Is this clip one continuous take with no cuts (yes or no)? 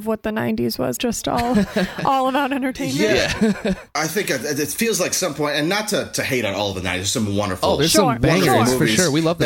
no